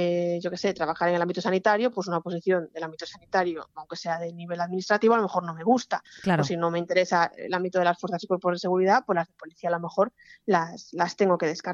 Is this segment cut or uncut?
uncut